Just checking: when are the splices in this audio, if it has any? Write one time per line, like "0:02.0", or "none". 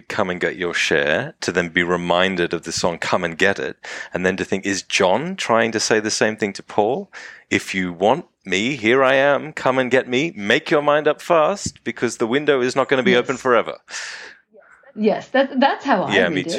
none

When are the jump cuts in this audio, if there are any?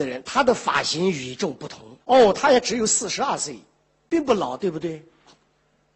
0:02.0

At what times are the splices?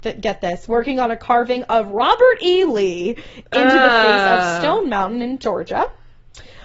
none

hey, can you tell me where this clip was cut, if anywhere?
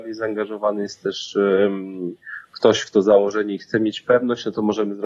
none

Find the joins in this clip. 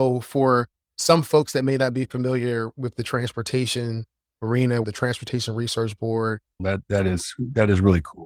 0:04.8
0:06.6

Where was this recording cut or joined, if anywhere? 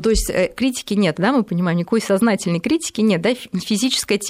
none

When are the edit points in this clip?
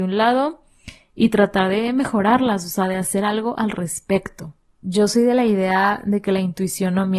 0:04.8

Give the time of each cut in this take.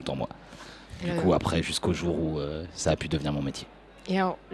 none

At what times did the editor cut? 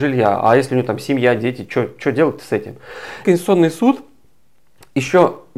0:03.2

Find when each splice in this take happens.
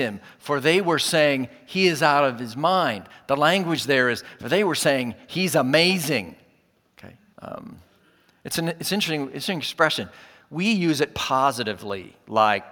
0:07.3

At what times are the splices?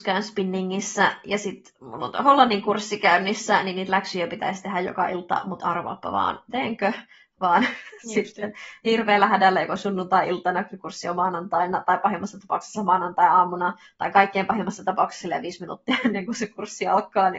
none

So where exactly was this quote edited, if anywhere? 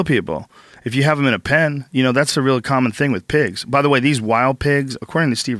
none

